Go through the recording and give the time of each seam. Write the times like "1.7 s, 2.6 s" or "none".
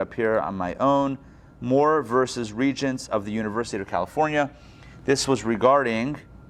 none